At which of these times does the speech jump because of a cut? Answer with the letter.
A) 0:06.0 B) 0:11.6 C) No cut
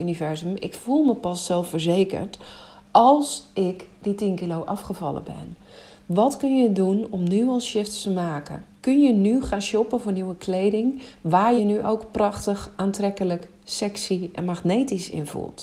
B